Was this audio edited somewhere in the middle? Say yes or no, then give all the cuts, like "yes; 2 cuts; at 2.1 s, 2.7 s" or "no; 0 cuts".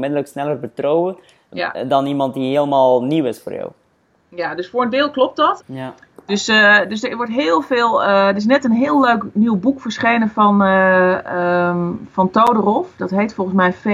yes; 1 cut; at 5.6 s